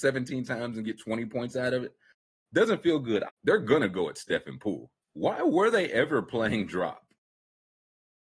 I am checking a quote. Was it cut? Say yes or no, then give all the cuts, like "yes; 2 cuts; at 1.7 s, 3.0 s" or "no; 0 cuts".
yes; 2 cuts; at 3.3 s, 5.0 s